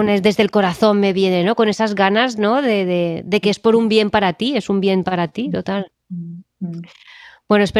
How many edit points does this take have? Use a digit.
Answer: 0